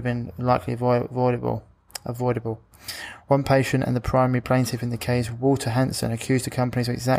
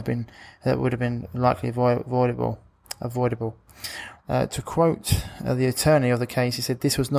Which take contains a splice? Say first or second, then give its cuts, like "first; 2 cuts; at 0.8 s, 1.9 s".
second; 1 cut; at 4.2 s